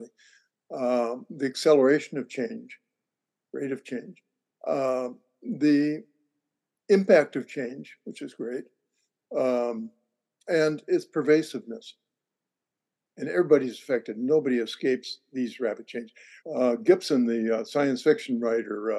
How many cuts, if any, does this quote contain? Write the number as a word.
one